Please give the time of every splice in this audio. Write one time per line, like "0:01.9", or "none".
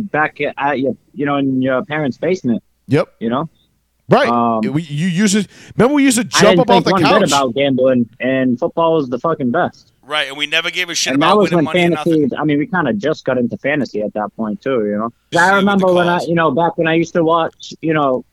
0:12.3
0:15.3